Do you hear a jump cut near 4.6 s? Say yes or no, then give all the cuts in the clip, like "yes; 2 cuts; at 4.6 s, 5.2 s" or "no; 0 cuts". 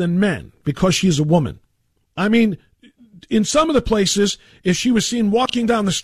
no; 1 cut; at 2.1 s